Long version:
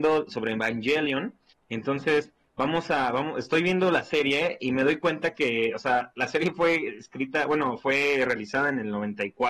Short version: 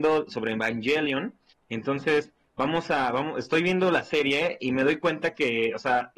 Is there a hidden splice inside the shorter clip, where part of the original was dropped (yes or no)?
no